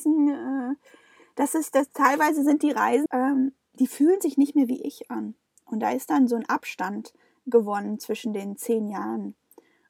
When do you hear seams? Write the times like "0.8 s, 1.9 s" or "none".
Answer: 3.1 s